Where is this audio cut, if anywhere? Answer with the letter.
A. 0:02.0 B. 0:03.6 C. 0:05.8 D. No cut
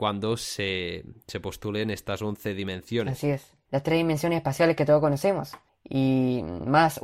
B